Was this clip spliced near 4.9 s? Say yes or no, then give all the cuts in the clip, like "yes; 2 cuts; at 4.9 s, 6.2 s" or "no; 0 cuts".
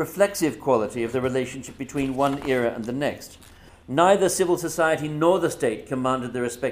no; 1 cut; at 3.7 s